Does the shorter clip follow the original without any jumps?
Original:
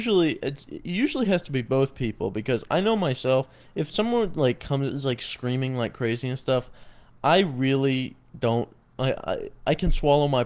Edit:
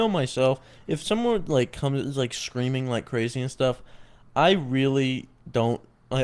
yes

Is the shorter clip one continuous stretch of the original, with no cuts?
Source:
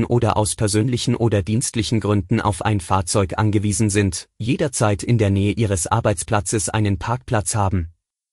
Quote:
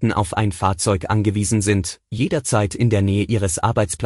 yes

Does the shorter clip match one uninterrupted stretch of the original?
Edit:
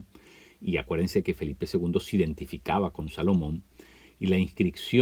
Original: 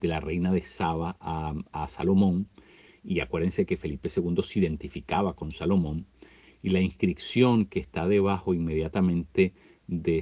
yes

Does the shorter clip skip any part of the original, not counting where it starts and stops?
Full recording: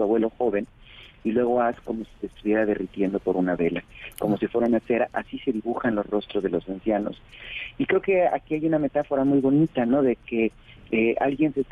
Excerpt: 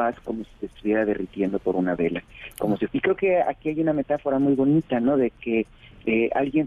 yes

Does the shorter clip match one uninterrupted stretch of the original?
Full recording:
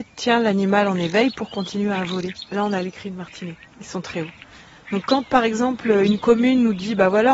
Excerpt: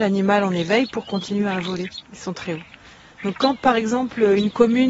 no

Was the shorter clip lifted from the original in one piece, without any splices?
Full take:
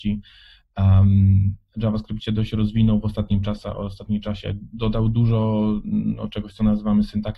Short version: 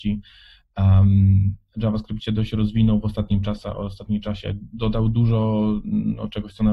yes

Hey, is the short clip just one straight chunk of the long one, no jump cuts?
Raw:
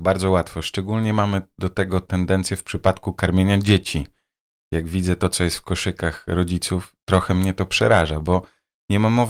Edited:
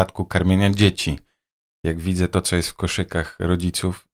yes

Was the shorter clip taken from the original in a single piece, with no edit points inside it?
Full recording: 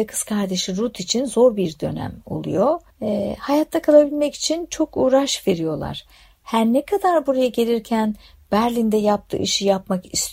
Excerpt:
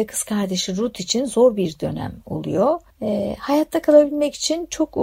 yes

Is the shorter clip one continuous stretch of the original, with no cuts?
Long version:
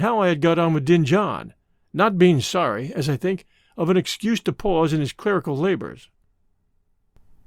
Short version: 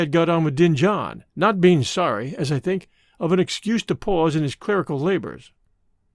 no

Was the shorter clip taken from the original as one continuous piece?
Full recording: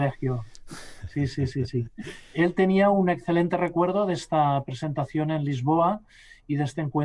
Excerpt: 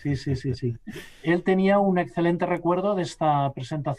yes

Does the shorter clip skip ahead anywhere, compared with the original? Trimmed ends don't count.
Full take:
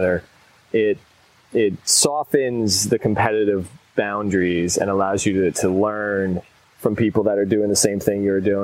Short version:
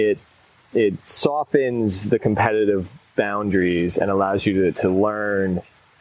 no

